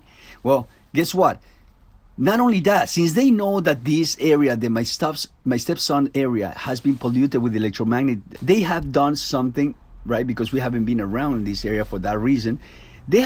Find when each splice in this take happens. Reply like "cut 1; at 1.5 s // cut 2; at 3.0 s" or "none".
cut 1; at 8.4 s